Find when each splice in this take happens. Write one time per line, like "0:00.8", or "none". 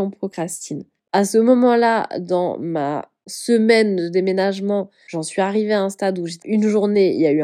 0:01.0
0:06.4